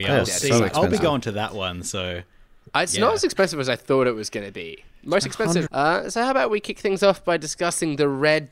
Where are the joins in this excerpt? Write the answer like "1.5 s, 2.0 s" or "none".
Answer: 5.7 s